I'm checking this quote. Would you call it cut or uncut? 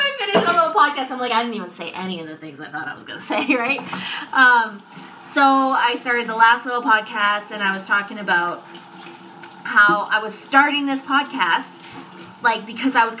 uncut